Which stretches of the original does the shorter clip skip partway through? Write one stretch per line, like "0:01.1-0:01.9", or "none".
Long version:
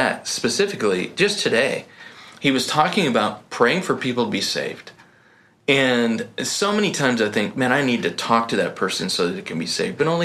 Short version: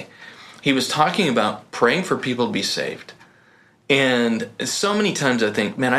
none

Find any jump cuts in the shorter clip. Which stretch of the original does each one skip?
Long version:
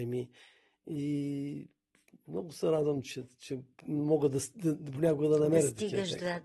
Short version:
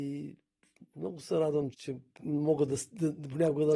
0:03.0-0:03.3

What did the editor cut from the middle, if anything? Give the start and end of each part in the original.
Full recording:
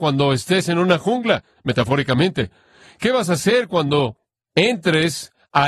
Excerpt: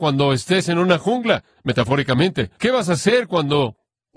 0:02.6-0:03.0

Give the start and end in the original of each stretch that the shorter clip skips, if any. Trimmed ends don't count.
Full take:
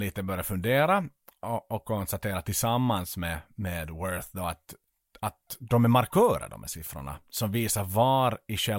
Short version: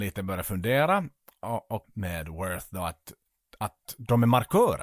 0:01.8-0:03.5

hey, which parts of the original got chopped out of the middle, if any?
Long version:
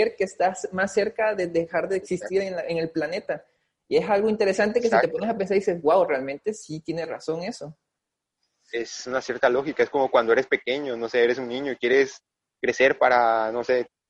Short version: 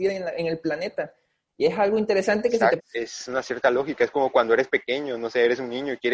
0:05.1-0:08.6

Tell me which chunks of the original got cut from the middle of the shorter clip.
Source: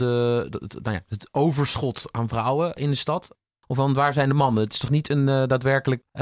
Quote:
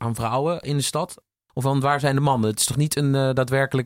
none

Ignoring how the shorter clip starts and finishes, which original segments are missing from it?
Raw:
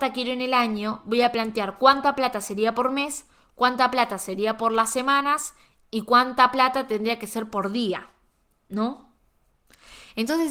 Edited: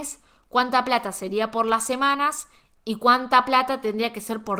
none

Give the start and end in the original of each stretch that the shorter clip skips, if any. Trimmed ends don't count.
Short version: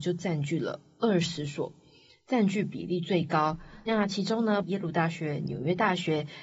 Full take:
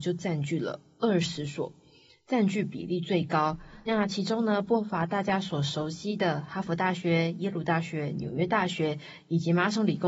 0:04.6-0:07.3

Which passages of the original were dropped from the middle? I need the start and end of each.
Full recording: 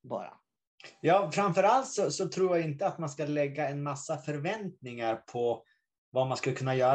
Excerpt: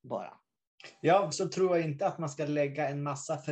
0:01.3-0:02.1

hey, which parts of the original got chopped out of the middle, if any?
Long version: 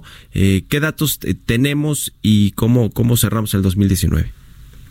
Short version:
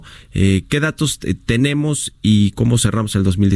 0:02.5-0:02.9

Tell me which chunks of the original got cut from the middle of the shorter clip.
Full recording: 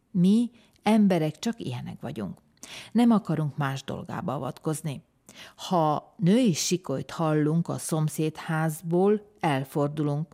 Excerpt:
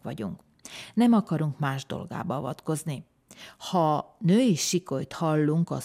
none

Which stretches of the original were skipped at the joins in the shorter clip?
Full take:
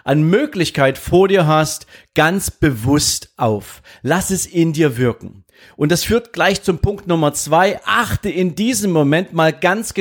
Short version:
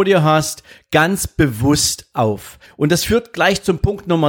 0:03.9-0:05.7

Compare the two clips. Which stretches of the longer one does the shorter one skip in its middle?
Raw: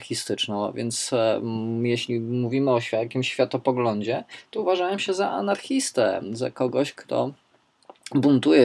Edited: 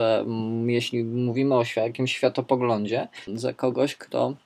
0:04.4-0:06.2

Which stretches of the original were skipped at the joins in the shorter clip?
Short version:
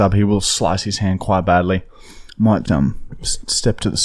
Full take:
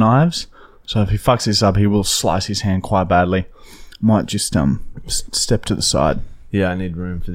0:04.3-0:04.5

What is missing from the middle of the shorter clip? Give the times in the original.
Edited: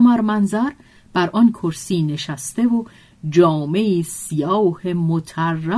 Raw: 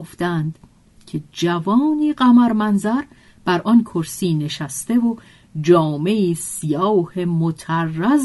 none

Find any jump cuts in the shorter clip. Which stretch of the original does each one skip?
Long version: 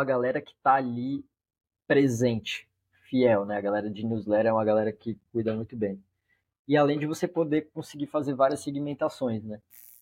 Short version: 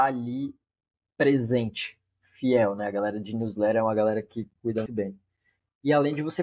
0:05.6-0:05.7

